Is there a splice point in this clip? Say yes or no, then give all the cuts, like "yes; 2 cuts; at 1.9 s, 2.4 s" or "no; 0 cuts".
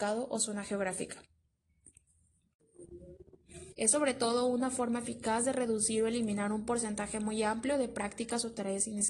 yes; 1 cut; at 3.7 s